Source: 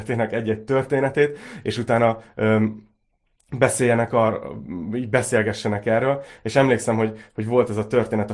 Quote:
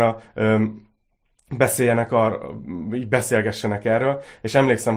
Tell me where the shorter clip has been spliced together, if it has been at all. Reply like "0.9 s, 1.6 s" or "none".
none